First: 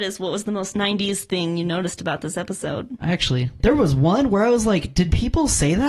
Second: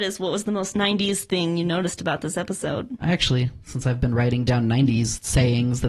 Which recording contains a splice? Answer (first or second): first